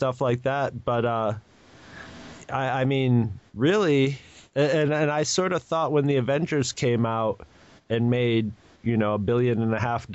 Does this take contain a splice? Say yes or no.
no